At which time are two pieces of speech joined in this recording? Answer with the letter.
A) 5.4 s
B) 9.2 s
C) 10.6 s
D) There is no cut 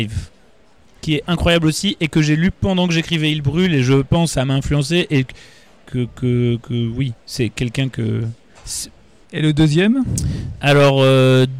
B